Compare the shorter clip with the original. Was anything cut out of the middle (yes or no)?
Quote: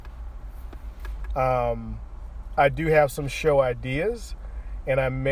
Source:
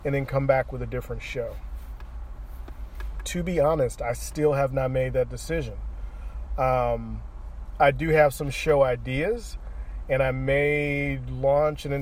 yes